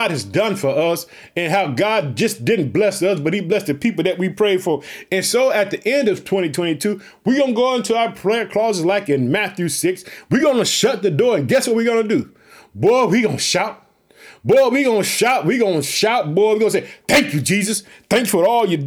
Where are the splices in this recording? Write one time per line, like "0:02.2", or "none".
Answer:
none